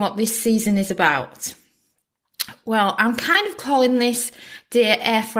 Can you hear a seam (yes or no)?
no